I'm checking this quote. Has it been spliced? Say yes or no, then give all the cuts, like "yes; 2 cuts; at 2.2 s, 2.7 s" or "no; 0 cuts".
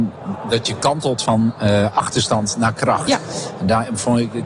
no; 0 cuts